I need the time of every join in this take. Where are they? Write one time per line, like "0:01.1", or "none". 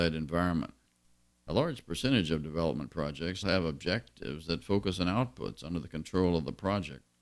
0:01.3
0:03.4